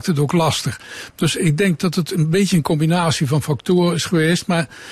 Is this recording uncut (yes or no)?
yes